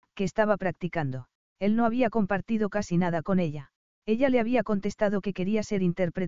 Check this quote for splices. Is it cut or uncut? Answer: cut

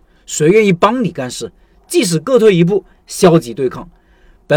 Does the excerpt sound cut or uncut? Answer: cut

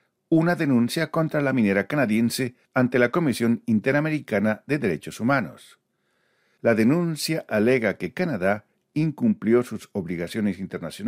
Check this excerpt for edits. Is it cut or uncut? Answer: cut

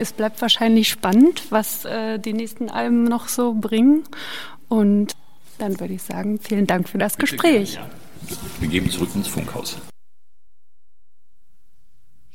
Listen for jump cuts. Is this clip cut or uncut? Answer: uncut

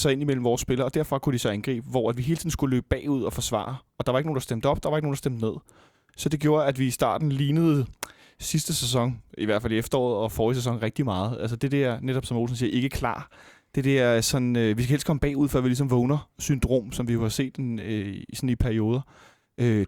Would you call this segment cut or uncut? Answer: uncut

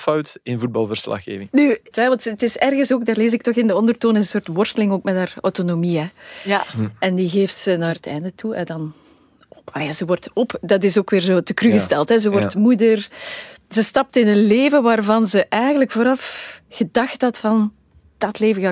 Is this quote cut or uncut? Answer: cut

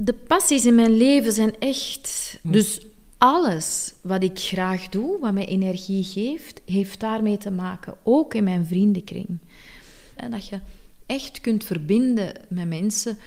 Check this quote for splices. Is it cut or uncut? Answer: cut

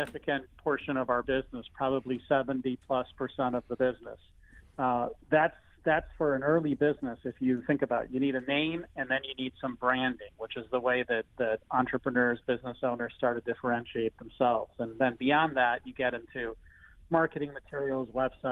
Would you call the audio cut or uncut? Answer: uncut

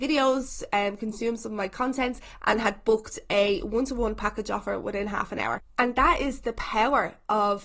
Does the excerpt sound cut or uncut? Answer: uncut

